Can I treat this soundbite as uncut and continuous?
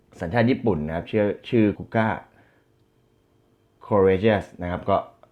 no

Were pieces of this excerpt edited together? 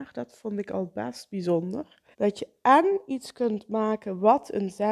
yes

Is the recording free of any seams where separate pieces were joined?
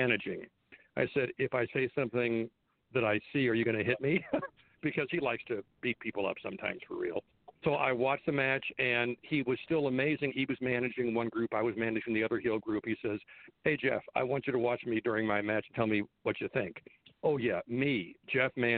no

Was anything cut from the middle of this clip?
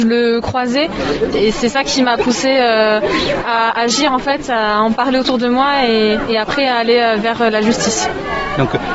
yes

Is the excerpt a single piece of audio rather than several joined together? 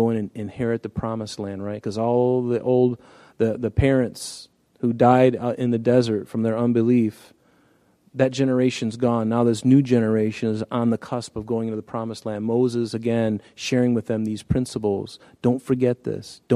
yes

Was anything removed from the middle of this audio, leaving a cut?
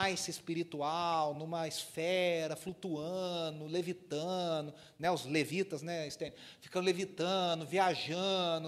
no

